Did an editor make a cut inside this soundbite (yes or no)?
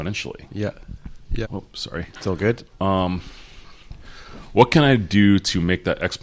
yes